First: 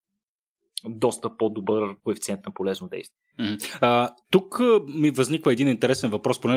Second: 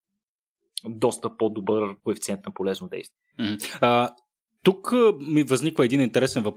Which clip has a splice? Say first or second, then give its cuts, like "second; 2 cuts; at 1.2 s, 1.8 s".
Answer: first; 1 cut; at 4.2 s